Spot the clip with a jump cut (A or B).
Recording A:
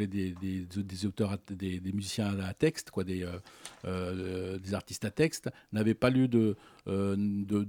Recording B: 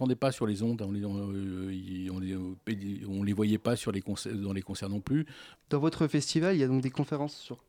B